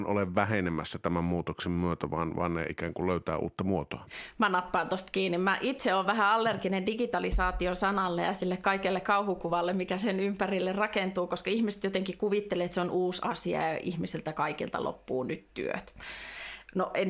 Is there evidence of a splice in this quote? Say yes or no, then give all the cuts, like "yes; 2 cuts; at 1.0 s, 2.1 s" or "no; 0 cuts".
no; 0 cuts